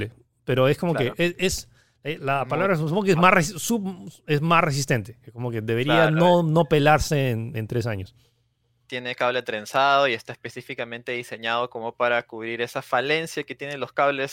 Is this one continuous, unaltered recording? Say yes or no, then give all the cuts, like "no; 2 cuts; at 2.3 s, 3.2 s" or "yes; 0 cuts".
yes; 0 cuts